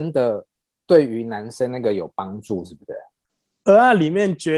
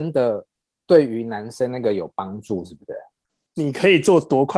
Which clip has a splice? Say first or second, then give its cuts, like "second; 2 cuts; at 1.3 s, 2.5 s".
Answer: second; 1 cut; at 3.5 s